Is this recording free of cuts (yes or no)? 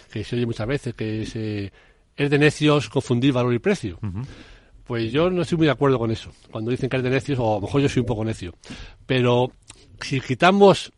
yes